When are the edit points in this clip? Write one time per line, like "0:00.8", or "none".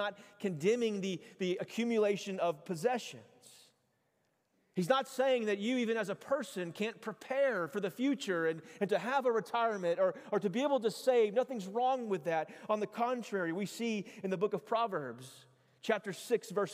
none